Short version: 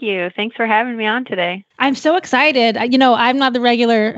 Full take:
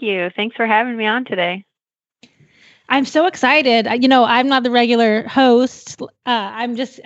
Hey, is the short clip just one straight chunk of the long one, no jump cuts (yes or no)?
no